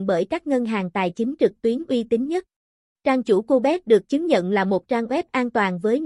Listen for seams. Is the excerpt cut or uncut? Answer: cut